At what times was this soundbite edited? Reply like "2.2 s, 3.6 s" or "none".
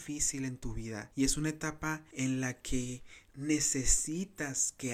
3.3 s